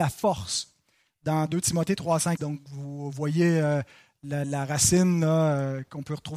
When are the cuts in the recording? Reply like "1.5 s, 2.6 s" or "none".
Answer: 2.4 s, 4.4 s